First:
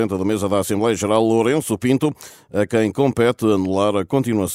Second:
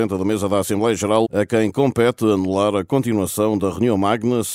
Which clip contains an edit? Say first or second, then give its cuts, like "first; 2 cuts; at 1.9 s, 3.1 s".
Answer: second; 1 cut; at 1.2 s